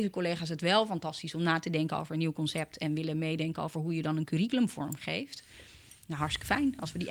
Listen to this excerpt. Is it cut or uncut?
uncut